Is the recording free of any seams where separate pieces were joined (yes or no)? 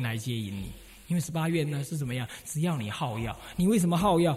yes